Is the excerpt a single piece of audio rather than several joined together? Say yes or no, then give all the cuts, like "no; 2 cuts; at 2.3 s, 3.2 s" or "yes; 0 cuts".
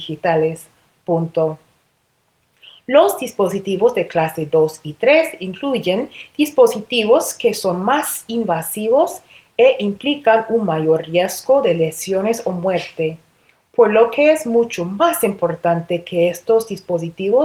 yes; 0 cuts